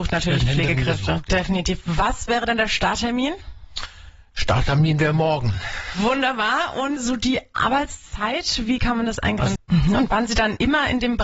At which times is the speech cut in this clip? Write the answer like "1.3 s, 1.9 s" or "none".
7.0 s, 9.6 s